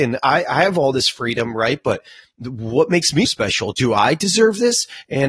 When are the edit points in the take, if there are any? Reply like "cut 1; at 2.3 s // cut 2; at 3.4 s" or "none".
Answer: cut 1; at 3.2 s